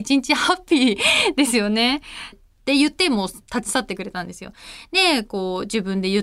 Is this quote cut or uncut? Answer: cut